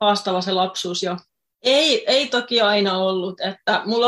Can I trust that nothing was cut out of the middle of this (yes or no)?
no